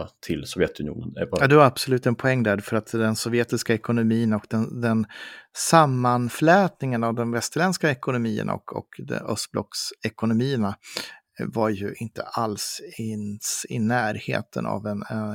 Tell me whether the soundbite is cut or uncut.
uncut